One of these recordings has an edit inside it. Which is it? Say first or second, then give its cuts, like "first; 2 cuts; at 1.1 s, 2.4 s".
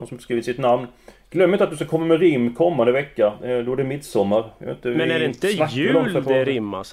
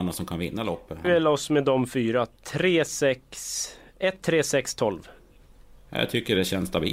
second; 1 cut; at 1.0 s